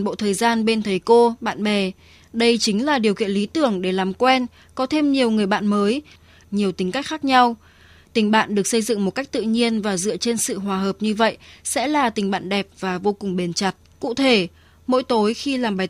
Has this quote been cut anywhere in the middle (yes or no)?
yes